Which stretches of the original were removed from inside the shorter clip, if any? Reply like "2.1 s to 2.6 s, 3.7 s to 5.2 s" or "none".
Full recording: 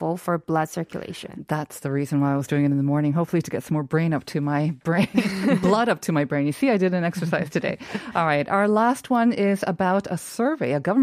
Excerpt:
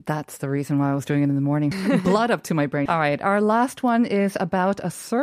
3.1 s to 5.3 s, 6.4 s to 8.1 s

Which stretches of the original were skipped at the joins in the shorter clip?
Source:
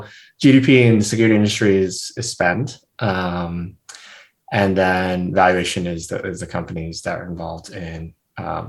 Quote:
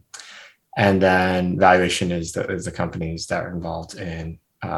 none

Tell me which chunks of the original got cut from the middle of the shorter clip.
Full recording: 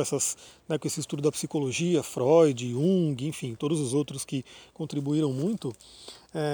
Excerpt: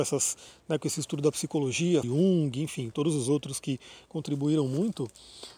2.0 s to 2.7 s

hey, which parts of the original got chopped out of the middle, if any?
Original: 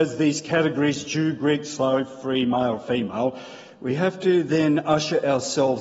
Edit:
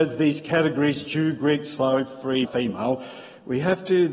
2.4 s to 2.8 s

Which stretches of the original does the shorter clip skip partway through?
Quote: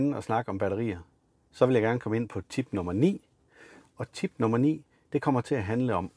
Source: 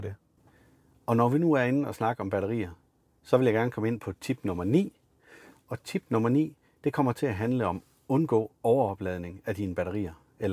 none

